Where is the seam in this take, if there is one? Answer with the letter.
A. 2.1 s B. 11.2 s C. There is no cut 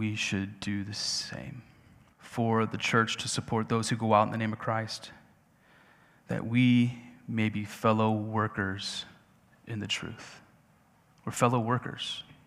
A